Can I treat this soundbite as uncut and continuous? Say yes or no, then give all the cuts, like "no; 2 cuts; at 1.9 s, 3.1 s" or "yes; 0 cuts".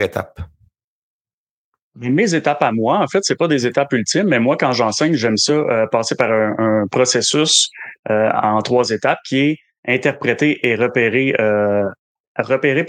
yes; 0 cuts